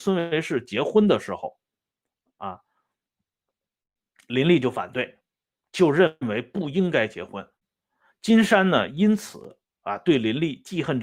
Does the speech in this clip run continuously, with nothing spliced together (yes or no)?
yes